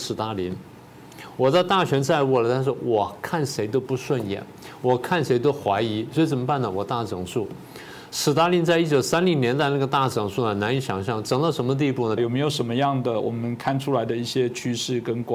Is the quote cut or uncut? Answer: cut